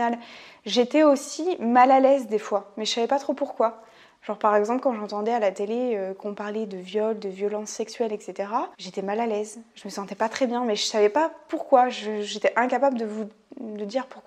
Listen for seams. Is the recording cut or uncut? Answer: cut